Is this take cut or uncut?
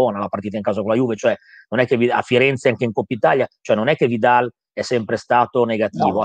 uncut